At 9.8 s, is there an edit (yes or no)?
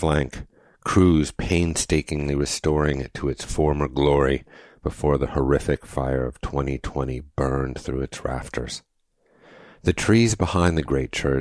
no